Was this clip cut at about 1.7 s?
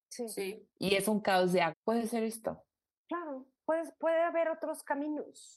yes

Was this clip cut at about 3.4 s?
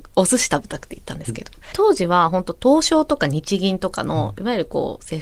no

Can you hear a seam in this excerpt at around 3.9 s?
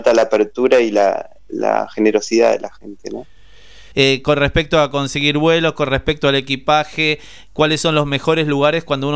yes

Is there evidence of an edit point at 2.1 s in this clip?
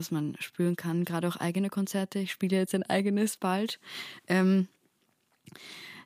no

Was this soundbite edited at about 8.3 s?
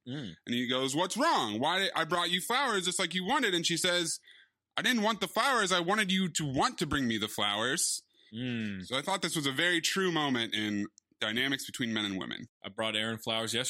yes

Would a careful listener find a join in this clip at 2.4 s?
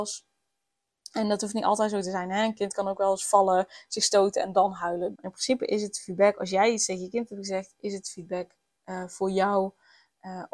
no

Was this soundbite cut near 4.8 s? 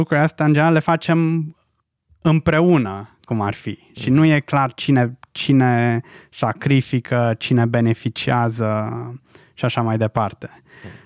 no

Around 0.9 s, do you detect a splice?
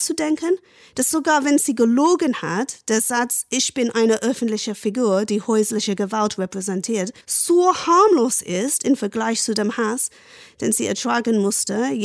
no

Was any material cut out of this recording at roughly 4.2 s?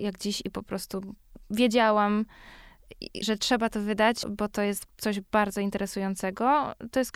yes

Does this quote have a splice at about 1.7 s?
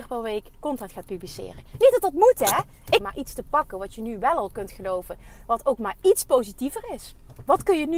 no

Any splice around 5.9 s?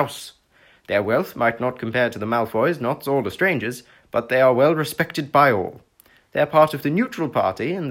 no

